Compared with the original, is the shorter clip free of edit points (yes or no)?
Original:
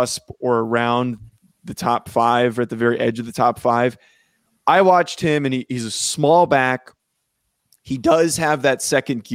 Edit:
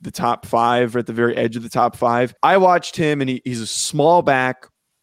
no